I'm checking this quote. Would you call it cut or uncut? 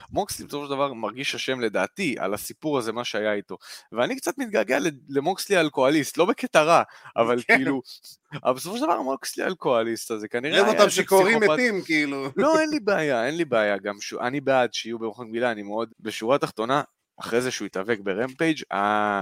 cut